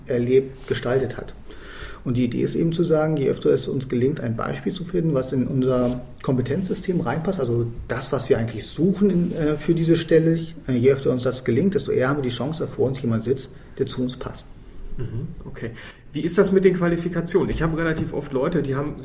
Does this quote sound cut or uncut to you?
uncut